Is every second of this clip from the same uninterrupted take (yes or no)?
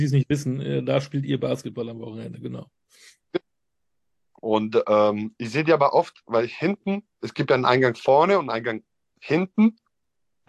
yes